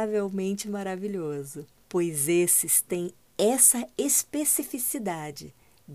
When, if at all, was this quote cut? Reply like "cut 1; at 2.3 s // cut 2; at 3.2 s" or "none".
cut 1; at 1.8 s